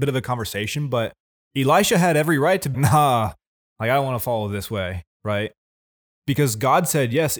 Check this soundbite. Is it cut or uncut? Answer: cut